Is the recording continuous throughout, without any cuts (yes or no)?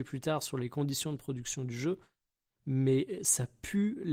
yes